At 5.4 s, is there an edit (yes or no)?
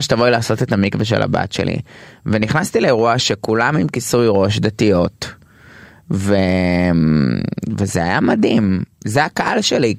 no